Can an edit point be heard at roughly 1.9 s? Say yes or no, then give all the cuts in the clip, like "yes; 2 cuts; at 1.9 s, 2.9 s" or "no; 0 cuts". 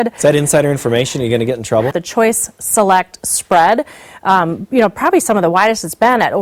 yes; 1 cut; at 1.9 s